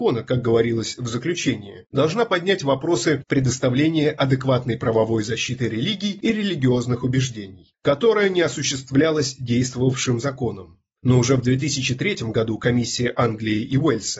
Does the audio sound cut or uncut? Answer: uncut